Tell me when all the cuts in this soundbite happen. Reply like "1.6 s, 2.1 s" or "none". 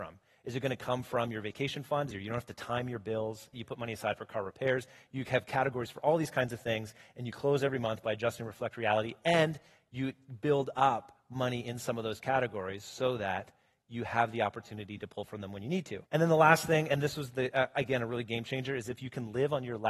2.1 s, 3.5 s, 16.1 s